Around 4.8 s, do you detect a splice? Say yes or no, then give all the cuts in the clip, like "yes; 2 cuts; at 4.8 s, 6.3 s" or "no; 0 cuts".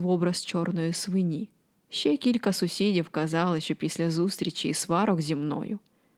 no; 1 cut; at 1.8 s